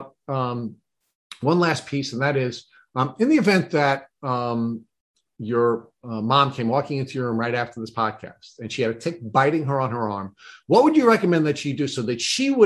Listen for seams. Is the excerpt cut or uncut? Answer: uncut